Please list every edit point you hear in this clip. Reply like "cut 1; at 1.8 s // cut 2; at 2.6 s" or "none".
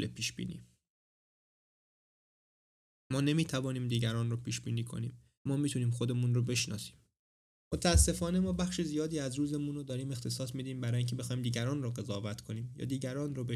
cut 1; at 5.4 s